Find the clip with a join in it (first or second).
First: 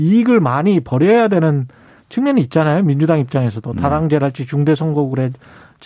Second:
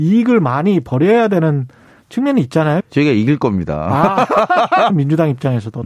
second